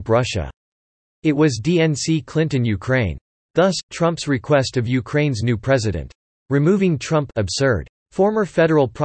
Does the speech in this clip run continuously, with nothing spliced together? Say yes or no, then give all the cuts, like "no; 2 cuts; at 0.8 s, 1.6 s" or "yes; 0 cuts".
yes; 0 cuts